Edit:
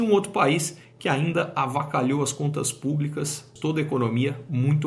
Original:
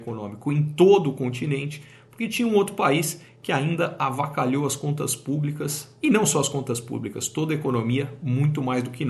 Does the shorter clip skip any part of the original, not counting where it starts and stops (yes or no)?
yes